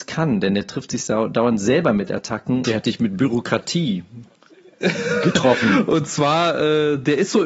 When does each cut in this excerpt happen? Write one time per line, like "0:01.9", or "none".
0:02.6